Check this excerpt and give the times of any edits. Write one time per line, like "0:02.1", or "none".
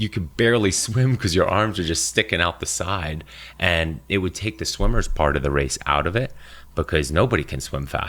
none